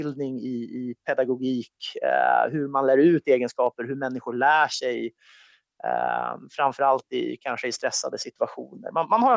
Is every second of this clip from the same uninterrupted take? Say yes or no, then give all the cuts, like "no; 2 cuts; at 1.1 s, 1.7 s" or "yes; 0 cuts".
yes; 0 cuts